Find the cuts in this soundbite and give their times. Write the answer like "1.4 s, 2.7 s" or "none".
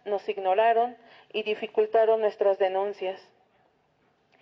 none